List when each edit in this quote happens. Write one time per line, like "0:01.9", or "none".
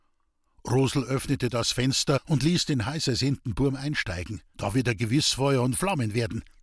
0:04.5